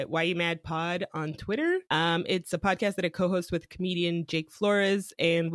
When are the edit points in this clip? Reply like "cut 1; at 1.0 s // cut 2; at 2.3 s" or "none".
cut 1; at 1.9 s